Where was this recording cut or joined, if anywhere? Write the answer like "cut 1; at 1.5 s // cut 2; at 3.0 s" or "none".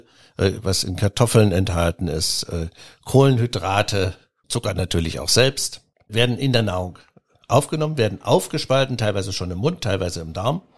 cut 1; at 4.4 s